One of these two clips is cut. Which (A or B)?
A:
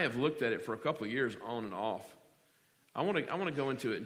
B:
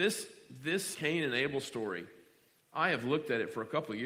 B